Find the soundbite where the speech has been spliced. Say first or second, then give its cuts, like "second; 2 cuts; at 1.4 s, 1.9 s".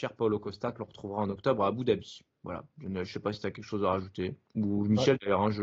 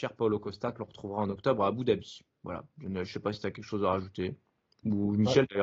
first; 1 cut; at 4.5 s